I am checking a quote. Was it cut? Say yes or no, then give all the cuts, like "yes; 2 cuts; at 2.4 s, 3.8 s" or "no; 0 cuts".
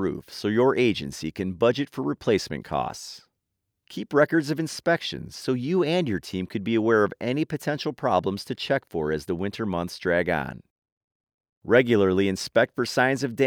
no; 0 cuts